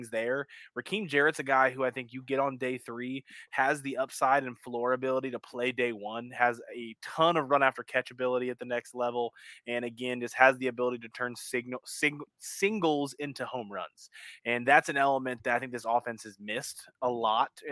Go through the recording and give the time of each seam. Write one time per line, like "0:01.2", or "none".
none

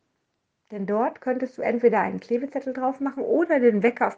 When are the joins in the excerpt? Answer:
none

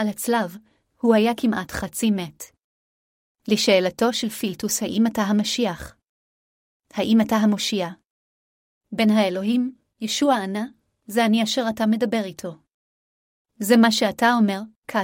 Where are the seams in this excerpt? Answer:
none

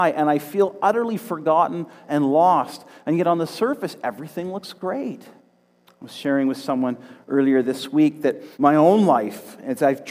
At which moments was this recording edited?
0:05.8
0:08.5

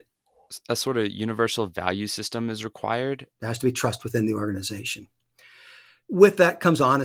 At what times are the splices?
0:03.3

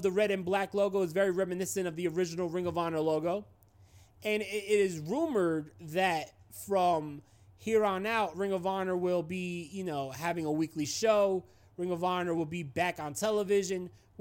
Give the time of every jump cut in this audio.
none

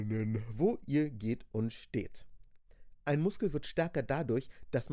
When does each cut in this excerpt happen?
none

